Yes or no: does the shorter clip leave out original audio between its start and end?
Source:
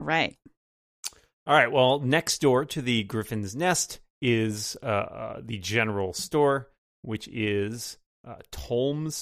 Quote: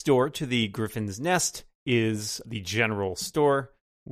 yes